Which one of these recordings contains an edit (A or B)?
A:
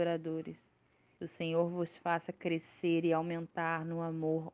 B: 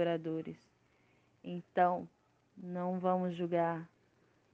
A